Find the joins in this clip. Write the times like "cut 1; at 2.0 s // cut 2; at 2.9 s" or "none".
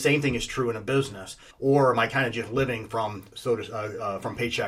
cut 1; at 1.5 s